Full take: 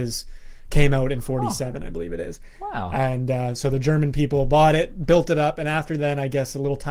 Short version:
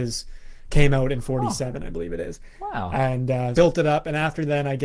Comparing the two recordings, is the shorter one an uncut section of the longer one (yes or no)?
no